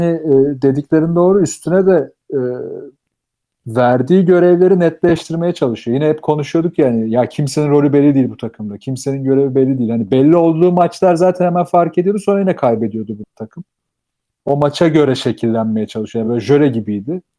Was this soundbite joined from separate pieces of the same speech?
no; 0 cuts

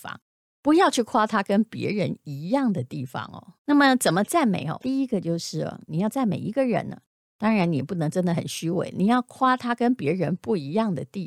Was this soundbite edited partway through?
yes; 2 cuts; at 3.6 s, 4.8 s

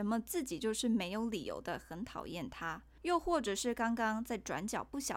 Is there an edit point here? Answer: yes; 1 cut; at 3.0 s

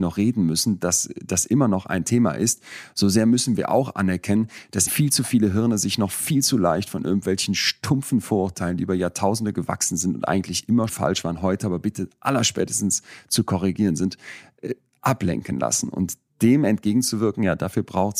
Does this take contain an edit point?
yes; 2 cuts; at 4.9 s, 10.9 s

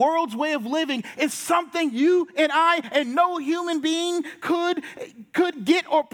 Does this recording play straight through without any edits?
yes; 0 cuts

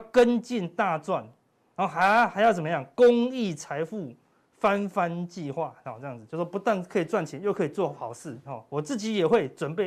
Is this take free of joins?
no; 1 cut; at 8.4 s

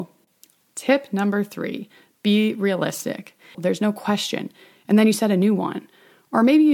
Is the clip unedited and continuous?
no; 1 cut; at 3.5 s

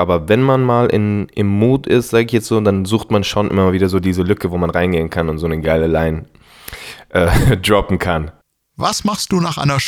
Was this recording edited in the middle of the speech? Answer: no; 0 cuts

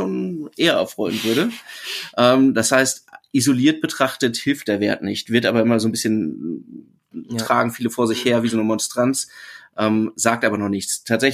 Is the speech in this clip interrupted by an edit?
no; 0 cuts

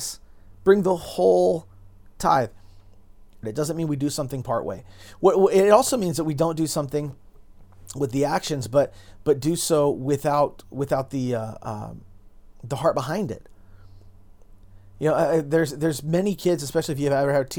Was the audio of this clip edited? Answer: yes; 1 cut; at 3.4 s

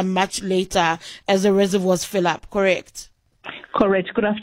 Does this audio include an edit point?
no; 0 cuts

